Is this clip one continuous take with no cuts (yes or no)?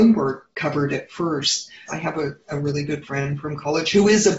no